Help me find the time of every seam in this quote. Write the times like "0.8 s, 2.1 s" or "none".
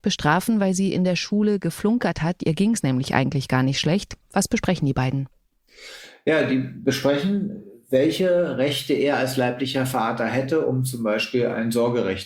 4.2 s